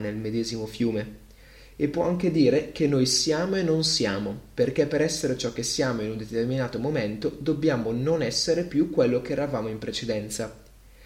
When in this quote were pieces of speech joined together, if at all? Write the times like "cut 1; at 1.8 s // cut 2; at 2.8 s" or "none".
none